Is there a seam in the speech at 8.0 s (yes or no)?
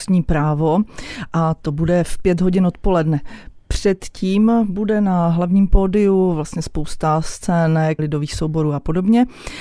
yes